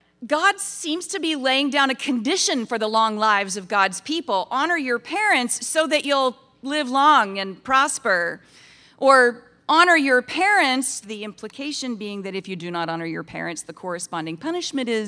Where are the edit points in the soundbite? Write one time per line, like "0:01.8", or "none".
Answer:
0:11.0